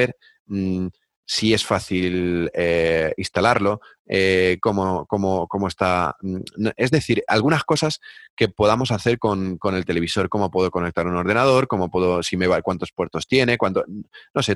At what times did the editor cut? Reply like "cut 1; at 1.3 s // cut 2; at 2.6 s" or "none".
none